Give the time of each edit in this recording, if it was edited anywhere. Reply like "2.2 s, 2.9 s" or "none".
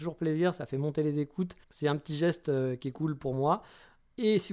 1.6 s